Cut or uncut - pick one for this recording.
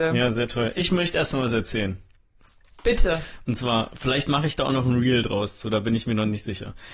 uncut